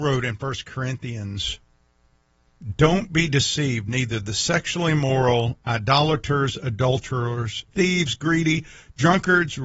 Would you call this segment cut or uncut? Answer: cut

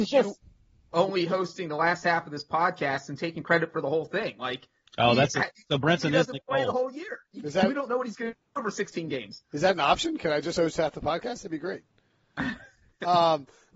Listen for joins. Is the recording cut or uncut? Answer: uncut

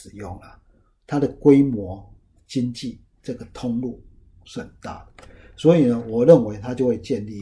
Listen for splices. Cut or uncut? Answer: uncut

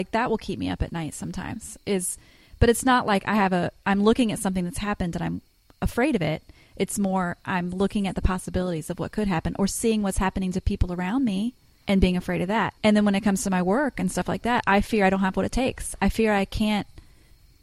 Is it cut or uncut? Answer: cut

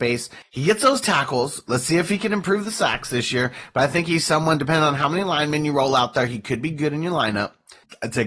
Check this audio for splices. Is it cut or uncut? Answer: uncut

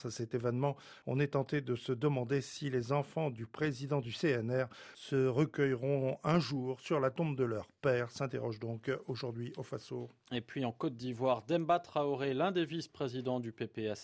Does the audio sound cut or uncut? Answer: uncut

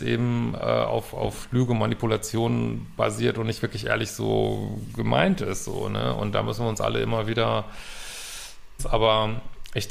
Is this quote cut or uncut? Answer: cut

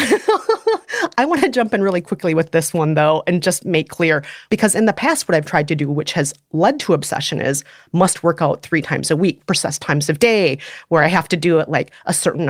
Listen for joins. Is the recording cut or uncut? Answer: cut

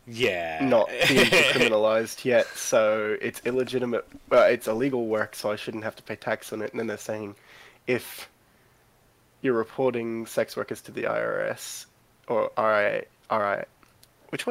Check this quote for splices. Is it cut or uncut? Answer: uncut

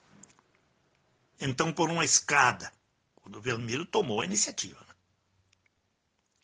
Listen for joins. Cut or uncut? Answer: cut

